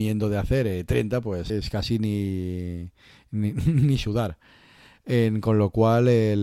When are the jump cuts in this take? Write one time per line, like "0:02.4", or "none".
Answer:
0:01.5